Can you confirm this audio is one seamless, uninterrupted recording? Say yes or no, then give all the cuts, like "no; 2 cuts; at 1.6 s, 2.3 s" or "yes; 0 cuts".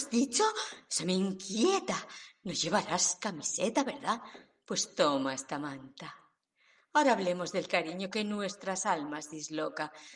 yes; 0 cuts